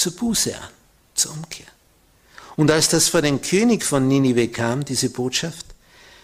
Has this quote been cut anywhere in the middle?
no; 0 cuts

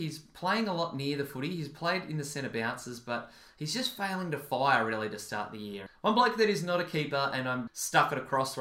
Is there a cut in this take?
yes; 2 cuts; at 5.9 s, 7.7 s

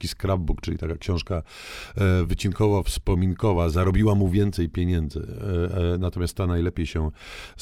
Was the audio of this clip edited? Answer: no; 0 cuts

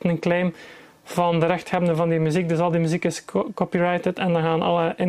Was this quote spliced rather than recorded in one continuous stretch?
no; 0 cuts

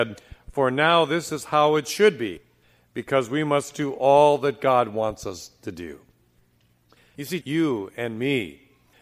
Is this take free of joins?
no; 1 cut; at 7.4 s

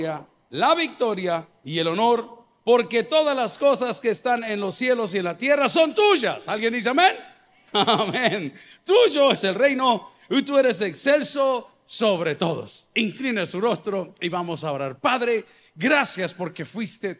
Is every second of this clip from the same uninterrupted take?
no; 1 cut; at 9.3 s

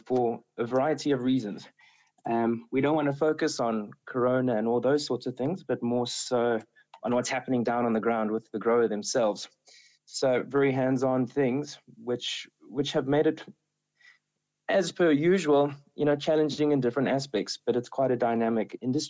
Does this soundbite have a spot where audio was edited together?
no; 0 cuts

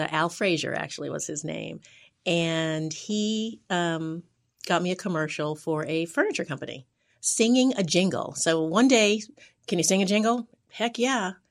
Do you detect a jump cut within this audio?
no; 0 cuts

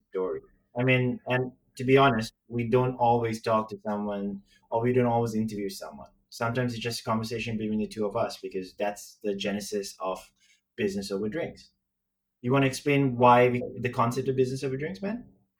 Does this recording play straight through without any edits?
yes; 0 cuts

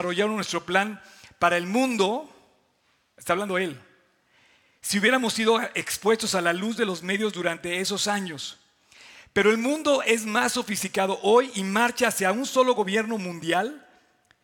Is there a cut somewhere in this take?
no; 0 cuts

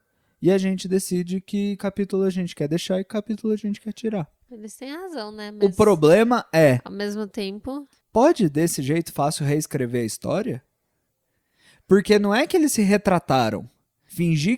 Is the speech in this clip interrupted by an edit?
no; 0 cuts

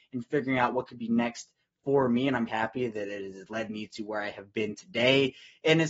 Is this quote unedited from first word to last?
no; 1 cut; at 2.5 s

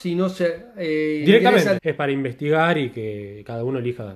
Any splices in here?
yes; 1 cut; at 1.8 s

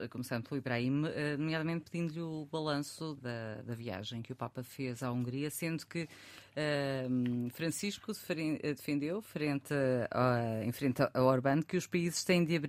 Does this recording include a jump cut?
yes; 1 cut; at 3.2 s

